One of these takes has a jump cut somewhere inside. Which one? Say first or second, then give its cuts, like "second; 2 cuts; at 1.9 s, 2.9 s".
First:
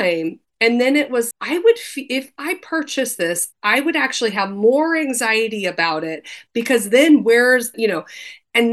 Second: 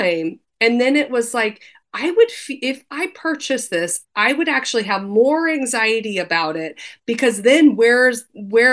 first; 2 cuts; at 1.3 s, 7.7 s